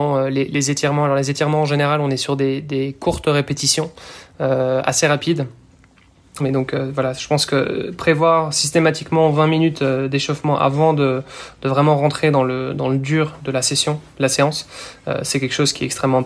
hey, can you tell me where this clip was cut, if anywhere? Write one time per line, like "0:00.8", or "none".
0:06.4